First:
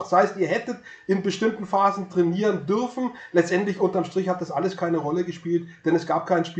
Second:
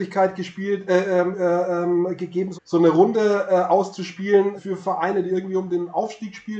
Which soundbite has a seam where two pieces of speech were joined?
second; 2 cuts; at 2.5 s, 4.6 s

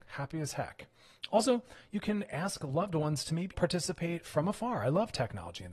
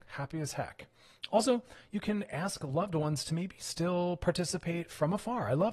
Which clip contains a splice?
first; 1 cut; at 3.5 s

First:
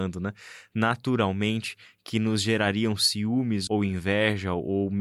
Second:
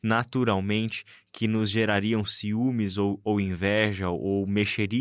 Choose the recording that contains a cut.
first; 1 cut; at 3.7 s

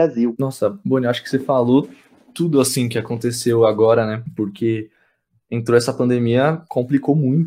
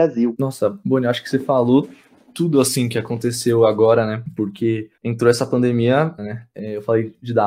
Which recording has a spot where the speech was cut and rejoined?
second; 2 cuts; at 5.0 s, 6.2 s

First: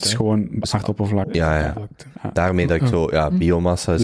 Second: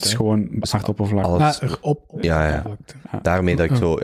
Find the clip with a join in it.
first; 1 cut; at 1.2 s

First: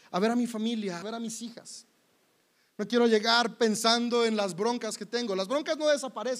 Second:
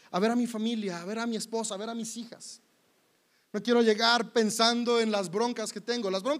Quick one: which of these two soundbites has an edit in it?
first; 1 cut; at 1.0 s

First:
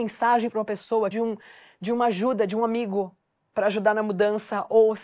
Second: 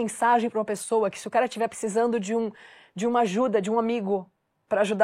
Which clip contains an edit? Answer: first; 1 cut; at 1.1 s

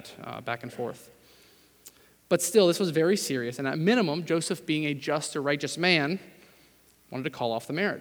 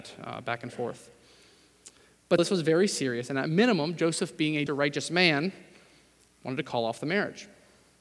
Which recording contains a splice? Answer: second; 2 cuts; at 2.4 s, 4.7 s

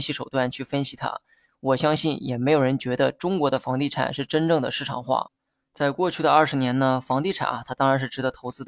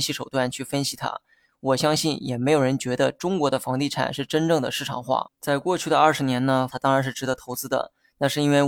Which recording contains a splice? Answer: second; 2 cuts; at 5.3 s, 6.7 s

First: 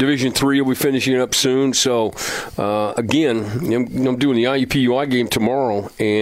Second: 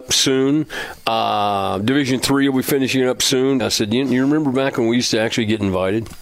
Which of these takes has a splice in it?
second; 1 cut; at 3.6 s

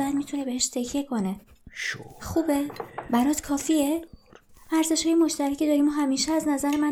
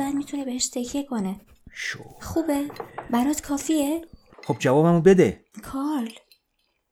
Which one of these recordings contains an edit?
second; 2 cuts; at 4.3 s, 5.5 s

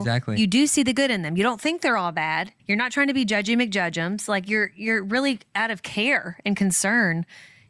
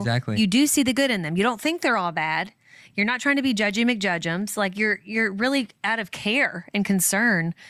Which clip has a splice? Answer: first; 1 cut; at 2.6 s

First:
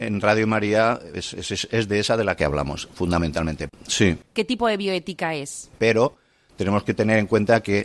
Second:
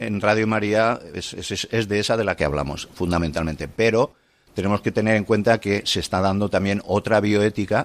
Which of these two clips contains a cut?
first; 2 cuts; at 3.7 s, 5.7 s

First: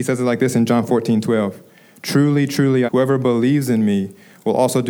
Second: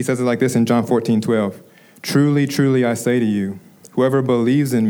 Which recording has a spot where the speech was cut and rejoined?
first; 1 cut; at 2.9 s

